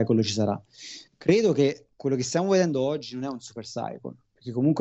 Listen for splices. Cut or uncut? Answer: cut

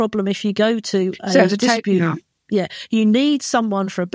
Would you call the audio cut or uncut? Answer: uncut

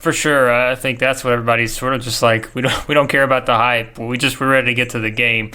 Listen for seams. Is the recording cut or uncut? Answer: uncut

